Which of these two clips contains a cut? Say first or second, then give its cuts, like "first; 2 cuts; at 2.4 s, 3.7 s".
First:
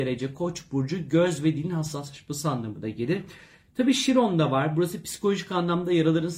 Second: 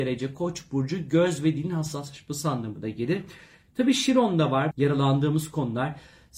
second; 1 cut; at 4.7 s